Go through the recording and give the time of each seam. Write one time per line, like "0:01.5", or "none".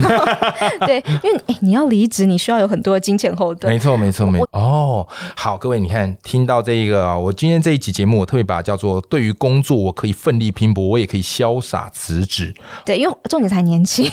0:04.4
0:12.8